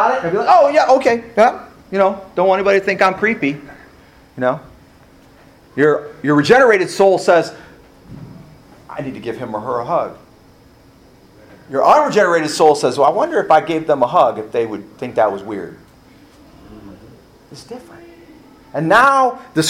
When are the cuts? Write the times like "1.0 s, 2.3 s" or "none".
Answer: none